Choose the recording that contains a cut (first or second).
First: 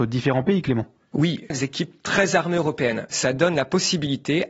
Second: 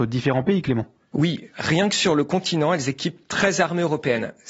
first